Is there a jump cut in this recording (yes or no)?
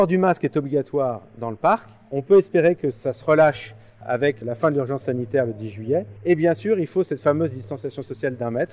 no